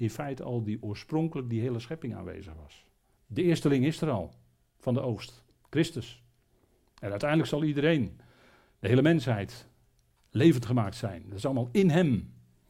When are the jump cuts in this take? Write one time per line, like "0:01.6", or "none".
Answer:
0:03.2